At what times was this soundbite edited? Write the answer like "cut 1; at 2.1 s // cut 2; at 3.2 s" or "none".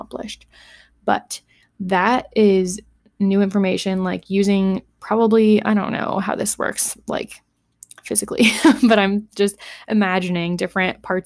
none